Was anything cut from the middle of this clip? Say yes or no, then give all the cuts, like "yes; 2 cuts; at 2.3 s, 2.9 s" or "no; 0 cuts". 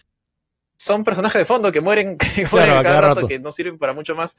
no; 0 cuts